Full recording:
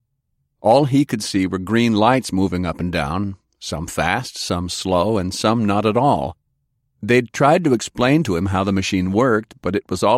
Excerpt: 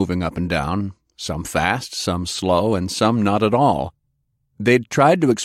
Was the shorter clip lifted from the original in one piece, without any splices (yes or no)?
yes